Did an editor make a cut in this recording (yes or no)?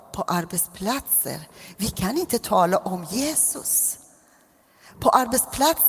no